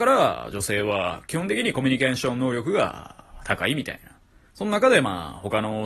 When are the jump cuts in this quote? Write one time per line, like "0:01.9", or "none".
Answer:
0:04.4